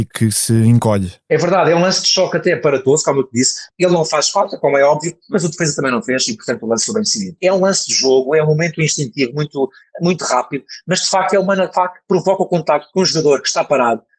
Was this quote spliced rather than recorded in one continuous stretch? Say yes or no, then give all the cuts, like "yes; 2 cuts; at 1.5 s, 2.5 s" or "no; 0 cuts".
yes; 2 cuts; at 3.7 s, 7.4 s